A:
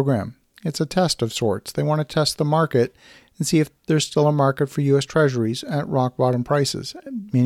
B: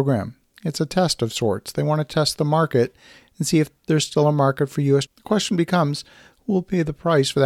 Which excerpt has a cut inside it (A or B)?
B